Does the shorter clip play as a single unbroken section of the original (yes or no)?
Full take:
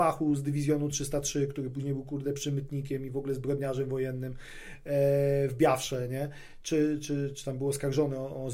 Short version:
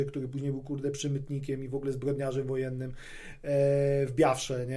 yes